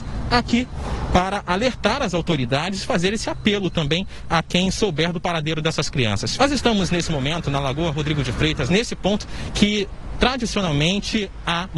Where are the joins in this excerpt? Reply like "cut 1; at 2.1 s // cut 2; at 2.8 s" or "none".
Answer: cut 1; at 6.4 s // cut 2; at 8.7 s